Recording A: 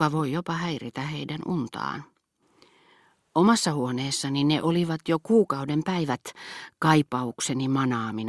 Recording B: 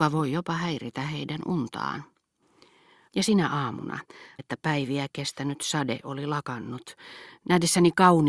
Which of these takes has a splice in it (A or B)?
B